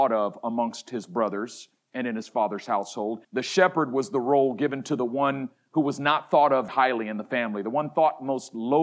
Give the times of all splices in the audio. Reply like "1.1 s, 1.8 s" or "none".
3.2 s, 6.7 s